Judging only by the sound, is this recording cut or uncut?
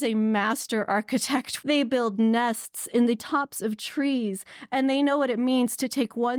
uncut